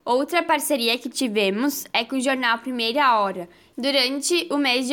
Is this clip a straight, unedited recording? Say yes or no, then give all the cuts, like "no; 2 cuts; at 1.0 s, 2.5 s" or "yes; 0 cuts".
no; 1 cut; at 3.7 s